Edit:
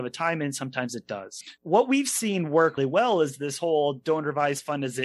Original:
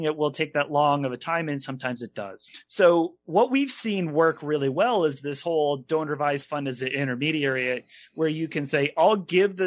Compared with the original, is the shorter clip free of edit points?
no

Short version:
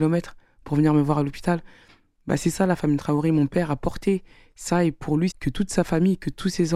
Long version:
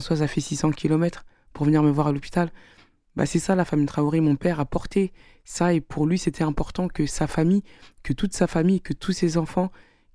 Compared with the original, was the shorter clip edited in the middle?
yes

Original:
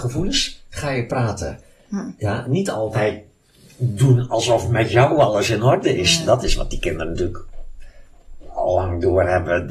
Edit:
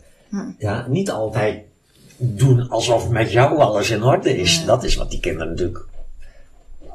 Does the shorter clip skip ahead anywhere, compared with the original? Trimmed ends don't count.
no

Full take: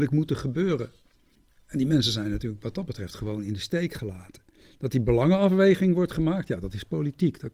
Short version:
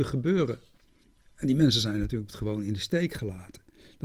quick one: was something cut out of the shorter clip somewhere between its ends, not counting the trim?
yes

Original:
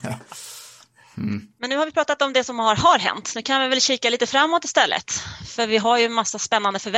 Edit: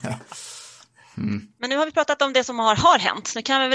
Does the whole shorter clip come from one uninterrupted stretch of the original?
yes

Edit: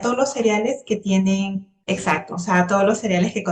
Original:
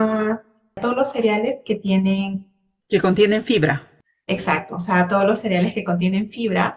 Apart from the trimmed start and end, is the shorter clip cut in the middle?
yes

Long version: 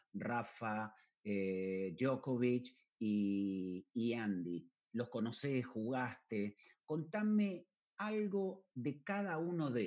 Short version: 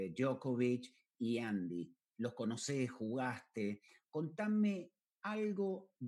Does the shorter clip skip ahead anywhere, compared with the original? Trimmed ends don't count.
yes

